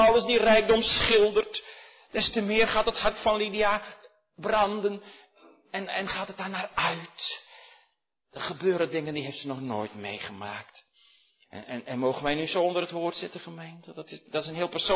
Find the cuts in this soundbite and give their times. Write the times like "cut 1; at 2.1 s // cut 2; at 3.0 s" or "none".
none